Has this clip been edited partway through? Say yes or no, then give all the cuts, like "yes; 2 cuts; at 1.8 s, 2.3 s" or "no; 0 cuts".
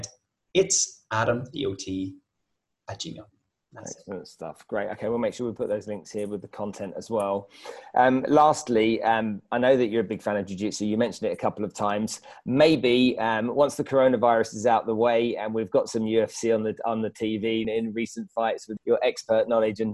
yes; 2 cuts; at 17.6 s, 18.8 s